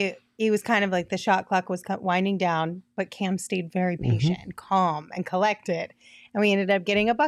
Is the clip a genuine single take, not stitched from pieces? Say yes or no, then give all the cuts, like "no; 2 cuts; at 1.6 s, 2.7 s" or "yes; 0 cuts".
yes; 0 cuts